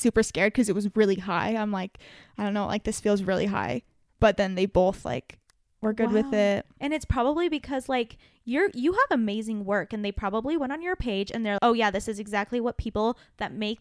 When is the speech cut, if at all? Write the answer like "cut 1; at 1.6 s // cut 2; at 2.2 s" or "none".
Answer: cut 1; at 11.6 s